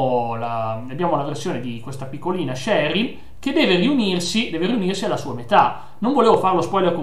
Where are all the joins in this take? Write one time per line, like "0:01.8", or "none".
none